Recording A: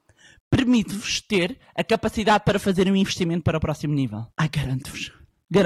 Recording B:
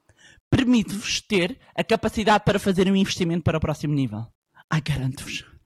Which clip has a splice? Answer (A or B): A